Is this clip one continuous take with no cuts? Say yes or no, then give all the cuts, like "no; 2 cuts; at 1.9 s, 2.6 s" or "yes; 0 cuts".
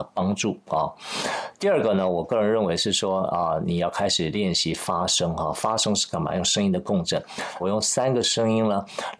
no; 1 cut; at 7.6 s